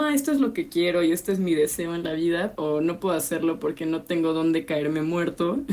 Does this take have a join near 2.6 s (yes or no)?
yes